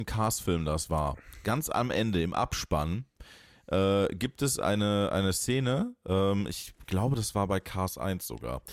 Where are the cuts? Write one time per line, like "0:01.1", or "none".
none

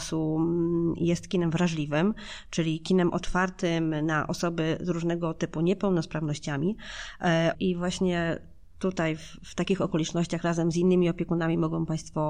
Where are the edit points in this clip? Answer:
0:07.5

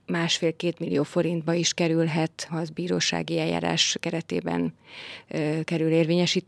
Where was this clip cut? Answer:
0:02.5

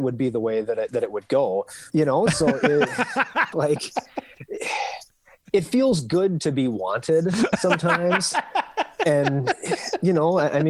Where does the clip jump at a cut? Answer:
0:01.9
0:03.5

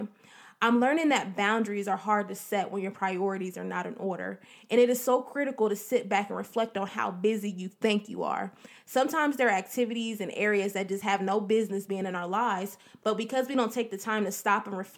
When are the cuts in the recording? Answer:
none

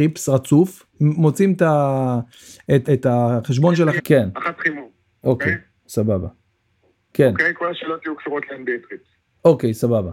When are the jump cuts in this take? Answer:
0:02.8
0:04.0
0:07.0

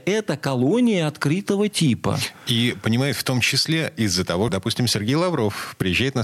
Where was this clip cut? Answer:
0:04.5

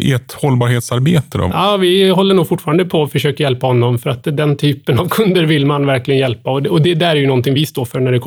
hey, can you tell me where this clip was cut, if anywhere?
0:01.5

